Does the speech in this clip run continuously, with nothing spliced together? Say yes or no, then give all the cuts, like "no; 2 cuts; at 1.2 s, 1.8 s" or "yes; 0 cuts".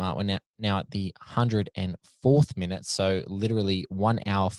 yes; 0 cuts